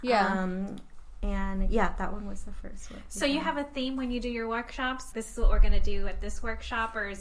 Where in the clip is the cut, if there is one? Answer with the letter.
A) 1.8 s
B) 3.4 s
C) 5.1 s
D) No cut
C